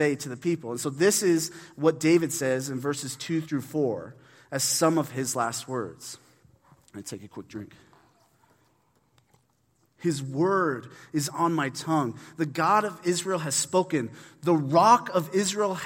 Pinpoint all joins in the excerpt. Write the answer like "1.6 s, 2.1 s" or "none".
9.9 s